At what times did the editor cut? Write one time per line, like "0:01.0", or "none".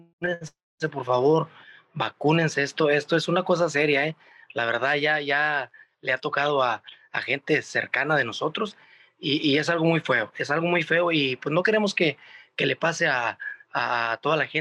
none